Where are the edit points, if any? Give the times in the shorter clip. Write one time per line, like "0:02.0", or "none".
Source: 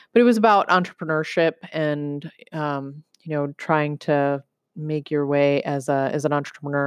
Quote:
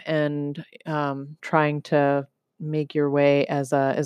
0:01.4